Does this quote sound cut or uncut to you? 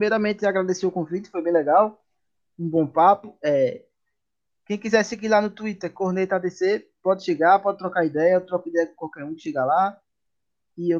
uncut